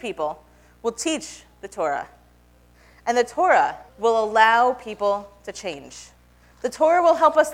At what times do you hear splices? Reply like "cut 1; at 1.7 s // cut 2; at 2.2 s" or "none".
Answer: cut 1; at 3.9 s